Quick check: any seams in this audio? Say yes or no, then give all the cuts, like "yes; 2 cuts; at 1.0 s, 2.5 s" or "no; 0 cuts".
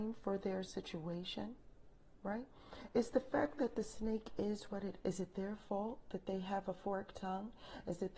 yes; 1 cut; at 5.0 s